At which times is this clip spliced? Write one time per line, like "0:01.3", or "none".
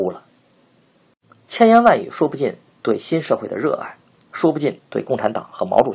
0:01.5